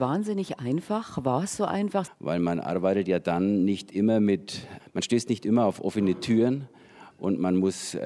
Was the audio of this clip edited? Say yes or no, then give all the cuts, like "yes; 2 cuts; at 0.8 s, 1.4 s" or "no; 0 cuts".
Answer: yes; 2 cuts; at 2.1 s, 4.8 s